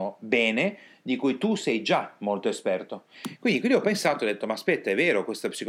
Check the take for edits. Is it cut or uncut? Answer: uncut